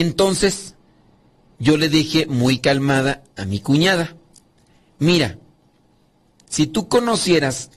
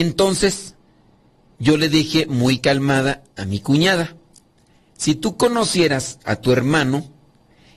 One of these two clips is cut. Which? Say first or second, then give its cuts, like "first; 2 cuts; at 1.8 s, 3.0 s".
second; 1 cut; at 4.9 s